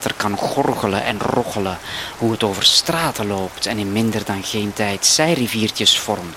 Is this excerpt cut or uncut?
uncut